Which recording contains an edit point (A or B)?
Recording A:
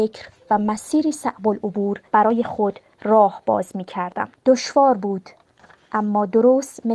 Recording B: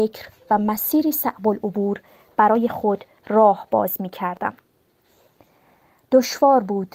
A